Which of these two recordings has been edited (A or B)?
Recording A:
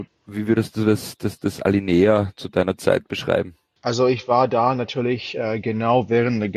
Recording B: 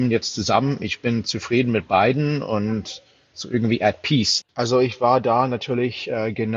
B